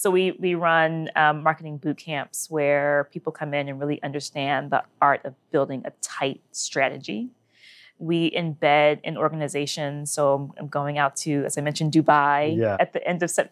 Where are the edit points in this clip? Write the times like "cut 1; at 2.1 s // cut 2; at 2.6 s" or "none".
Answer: none